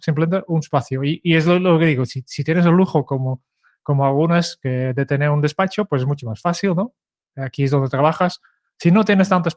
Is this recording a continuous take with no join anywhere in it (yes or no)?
yes